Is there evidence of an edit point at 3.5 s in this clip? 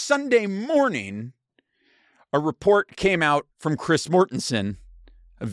yes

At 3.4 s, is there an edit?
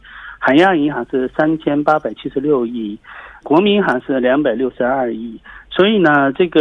yes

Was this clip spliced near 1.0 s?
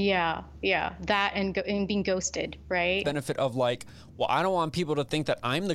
no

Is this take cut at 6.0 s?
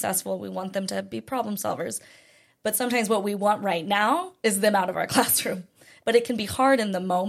yes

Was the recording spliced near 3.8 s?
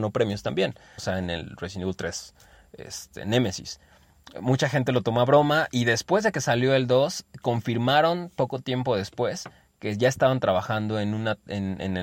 no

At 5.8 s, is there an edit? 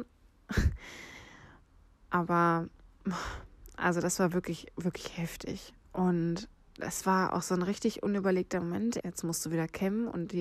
yes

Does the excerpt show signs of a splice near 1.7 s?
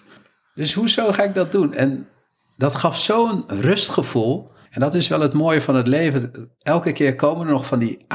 no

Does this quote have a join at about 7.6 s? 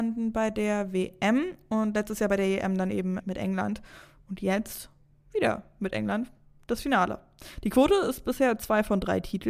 no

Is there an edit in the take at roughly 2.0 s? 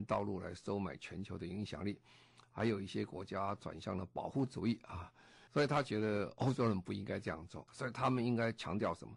no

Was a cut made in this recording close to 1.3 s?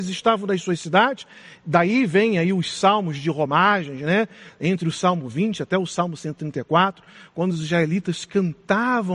no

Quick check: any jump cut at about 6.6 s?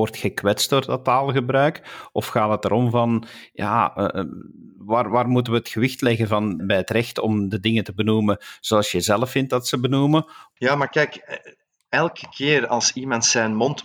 yes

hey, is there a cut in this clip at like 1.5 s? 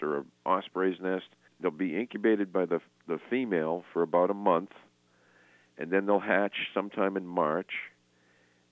yes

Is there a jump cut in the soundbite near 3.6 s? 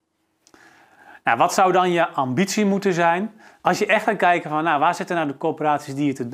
yes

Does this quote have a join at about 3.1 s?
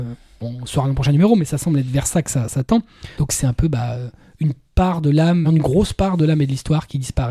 yes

